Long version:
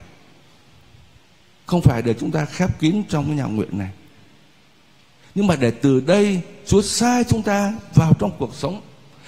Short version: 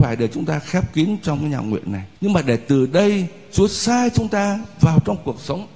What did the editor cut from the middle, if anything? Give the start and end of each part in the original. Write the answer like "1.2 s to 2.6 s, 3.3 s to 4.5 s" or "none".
4.0 s to 5.3 s